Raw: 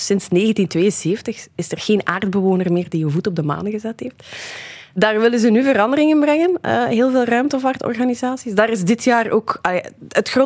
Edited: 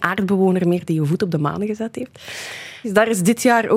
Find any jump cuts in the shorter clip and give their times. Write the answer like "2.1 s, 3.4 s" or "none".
2.8 s